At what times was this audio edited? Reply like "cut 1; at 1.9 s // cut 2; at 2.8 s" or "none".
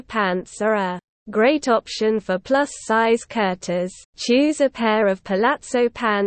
cut 1; at 4.0 s